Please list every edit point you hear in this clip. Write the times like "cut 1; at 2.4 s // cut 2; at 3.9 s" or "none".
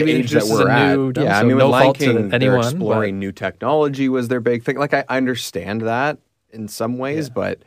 cut 1; at 1.2 s

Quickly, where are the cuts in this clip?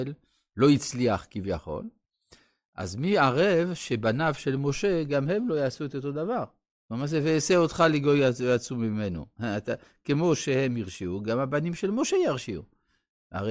none

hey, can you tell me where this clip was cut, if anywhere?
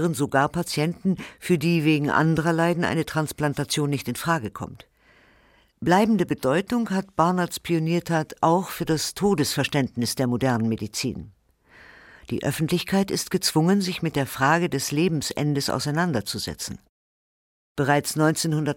none

